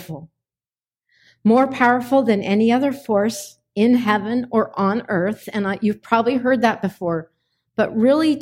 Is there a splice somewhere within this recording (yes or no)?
no